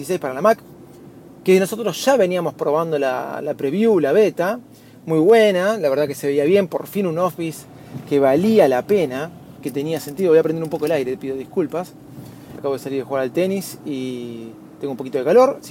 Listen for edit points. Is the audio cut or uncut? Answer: cut